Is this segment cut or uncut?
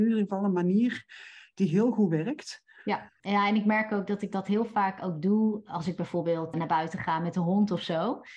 cut